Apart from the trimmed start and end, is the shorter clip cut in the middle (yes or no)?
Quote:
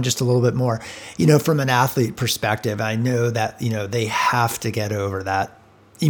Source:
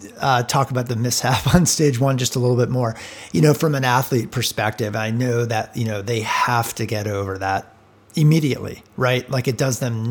no